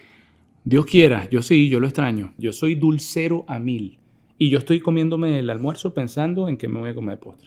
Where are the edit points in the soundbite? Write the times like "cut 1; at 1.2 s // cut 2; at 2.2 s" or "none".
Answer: cut 1; at 2.4 s

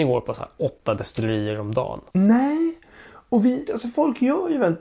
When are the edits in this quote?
cut 1; at 2.1 s // cut 2; at 3.7 s

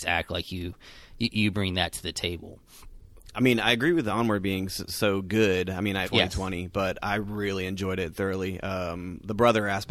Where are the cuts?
cut 1; at 6.0 s

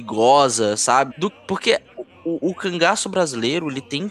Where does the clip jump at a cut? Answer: cut 1; at 1.1 s // cut 2; at 2.4 s

